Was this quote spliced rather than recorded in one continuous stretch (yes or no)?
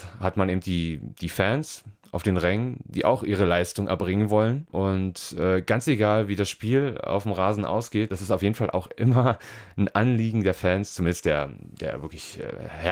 no